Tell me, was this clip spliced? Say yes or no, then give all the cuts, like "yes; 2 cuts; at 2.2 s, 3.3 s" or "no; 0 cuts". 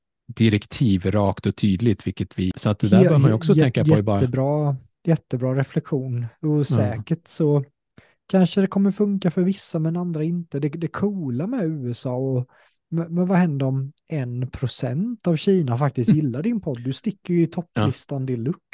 yes; 1 cut; at 2.5 s